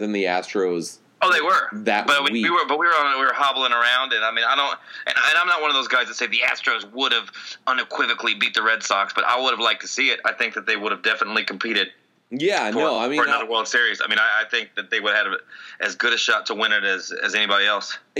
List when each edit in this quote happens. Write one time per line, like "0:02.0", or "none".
none